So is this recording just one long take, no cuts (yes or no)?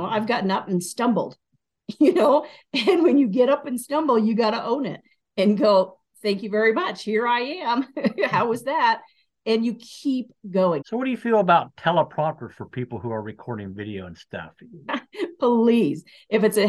no